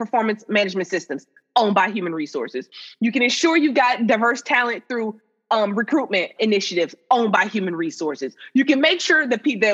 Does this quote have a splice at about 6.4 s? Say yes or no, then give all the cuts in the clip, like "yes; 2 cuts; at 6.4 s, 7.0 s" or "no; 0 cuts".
yes; 1 cut; at 6.4 s